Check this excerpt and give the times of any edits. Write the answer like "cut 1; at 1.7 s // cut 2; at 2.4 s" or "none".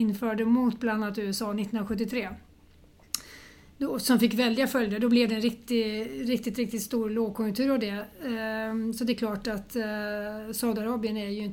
none

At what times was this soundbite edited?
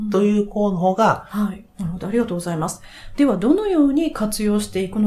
cut 1; at 1.7 s

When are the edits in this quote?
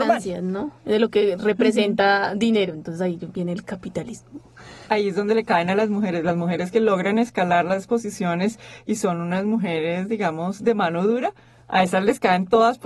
cut 1; at 4.9 s

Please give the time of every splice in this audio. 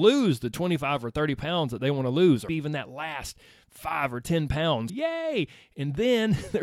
cut 1; at 2.5 s // cut 2; at 4.9 s

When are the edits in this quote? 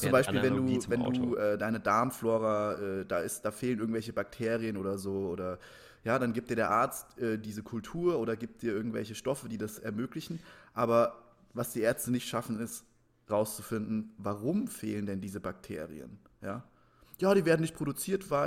none

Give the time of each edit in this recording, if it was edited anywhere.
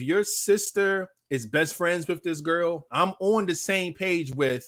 cut 1; at 2.9 s

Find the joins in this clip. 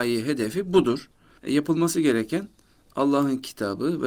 cut 1; at 1.4 s

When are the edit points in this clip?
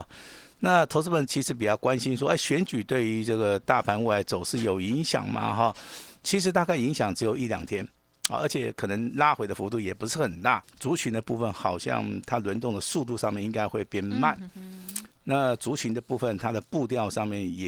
cut 1; at 10.6 s

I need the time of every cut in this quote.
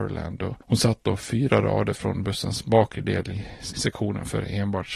cut 1; at 3.7 s

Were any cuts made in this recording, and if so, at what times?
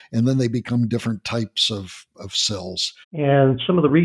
cut 1; at 3.0 s

